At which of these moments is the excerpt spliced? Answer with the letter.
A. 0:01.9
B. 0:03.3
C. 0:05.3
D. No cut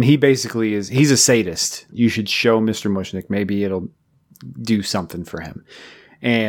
A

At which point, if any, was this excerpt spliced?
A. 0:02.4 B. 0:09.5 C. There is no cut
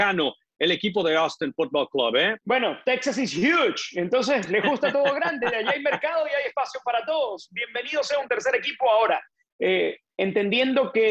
A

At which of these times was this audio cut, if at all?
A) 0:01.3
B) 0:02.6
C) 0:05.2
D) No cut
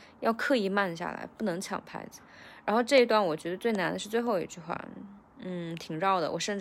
D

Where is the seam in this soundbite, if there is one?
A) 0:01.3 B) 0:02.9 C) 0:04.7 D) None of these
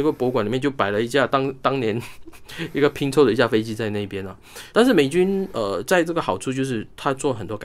C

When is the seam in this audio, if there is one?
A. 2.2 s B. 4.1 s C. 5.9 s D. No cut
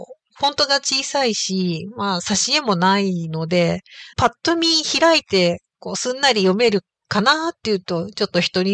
B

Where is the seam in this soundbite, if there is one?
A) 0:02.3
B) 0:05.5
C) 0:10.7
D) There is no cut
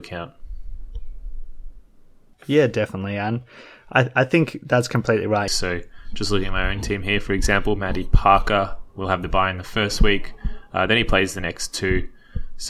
B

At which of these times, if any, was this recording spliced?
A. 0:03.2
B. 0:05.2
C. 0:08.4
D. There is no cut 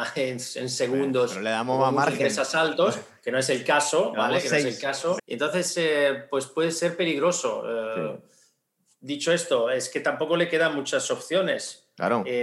B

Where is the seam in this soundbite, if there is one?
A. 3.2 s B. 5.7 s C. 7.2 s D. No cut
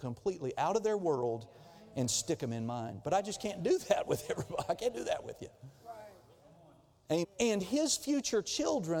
C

